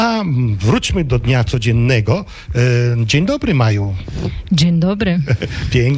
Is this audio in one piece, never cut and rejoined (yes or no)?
yes